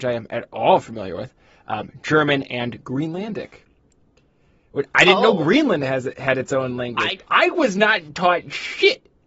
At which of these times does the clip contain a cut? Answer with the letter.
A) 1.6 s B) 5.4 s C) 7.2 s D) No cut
C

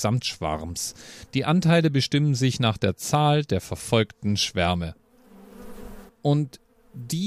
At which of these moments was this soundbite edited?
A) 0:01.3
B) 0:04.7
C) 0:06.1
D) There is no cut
C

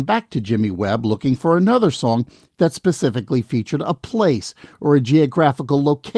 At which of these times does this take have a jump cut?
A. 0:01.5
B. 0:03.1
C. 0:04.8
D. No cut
D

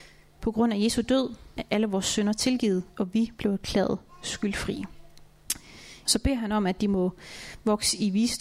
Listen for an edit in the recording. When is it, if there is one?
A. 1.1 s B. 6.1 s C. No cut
B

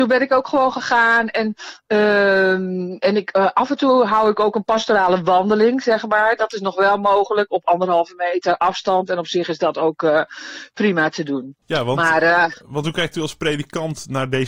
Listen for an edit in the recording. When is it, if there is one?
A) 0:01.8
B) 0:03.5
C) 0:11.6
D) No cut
C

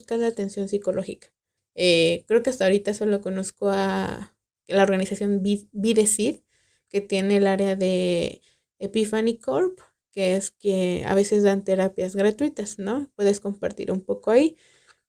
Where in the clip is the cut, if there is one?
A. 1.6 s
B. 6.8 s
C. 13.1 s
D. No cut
A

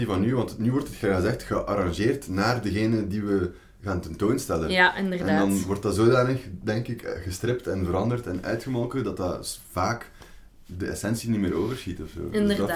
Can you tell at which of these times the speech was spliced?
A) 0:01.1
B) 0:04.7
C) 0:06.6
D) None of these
D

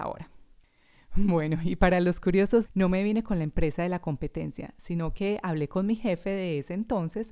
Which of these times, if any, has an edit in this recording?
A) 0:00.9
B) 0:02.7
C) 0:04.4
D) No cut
B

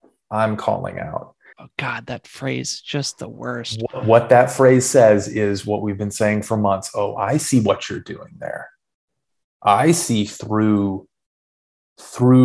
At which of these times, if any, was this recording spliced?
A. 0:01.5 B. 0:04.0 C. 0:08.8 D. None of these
A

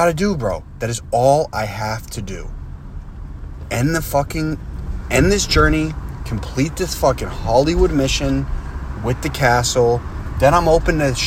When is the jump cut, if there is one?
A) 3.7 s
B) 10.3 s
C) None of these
C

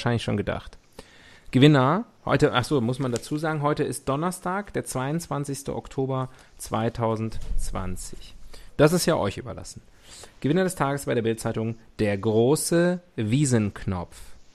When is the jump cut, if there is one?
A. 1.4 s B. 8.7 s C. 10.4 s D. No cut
B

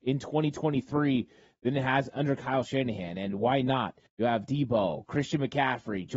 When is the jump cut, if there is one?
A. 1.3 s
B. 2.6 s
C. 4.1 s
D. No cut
C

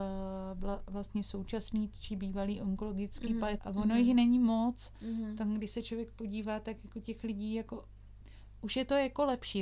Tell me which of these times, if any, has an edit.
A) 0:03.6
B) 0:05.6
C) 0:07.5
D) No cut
A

